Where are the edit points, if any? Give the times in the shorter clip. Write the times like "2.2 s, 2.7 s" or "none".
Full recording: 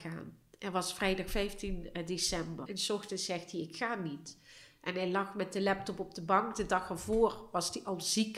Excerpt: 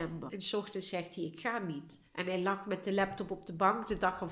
2.1 s

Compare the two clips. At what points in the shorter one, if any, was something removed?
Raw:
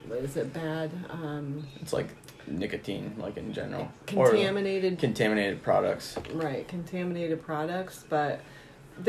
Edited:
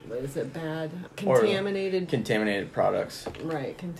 1.1 s

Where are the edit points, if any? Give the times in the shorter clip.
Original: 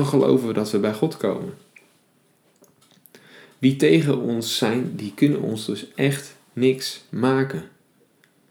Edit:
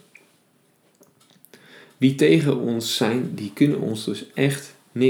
none

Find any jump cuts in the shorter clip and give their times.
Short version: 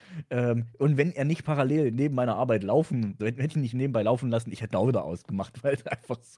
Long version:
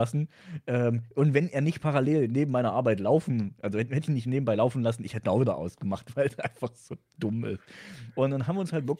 3.2 s

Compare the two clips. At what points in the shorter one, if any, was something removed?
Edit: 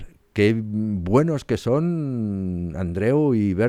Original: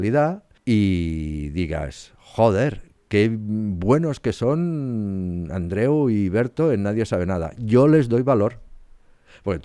none

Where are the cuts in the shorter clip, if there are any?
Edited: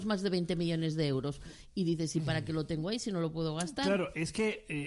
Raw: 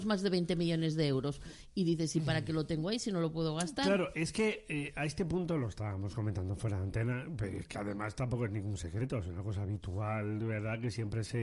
none

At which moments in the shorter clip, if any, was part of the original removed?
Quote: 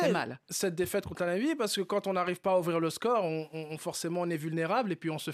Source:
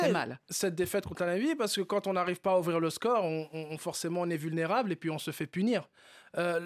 none

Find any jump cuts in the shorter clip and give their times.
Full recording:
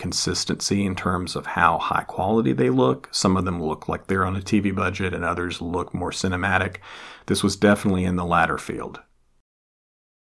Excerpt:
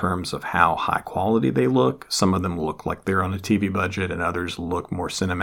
none

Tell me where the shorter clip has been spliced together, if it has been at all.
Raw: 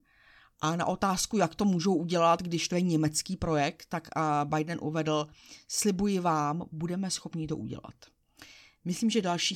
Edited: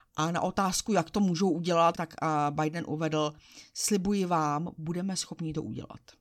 1.9 s

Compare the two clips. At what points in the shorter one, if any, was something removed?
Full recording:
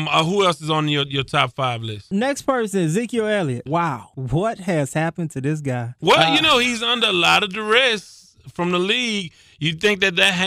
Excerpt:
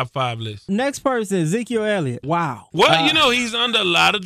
2.7 s

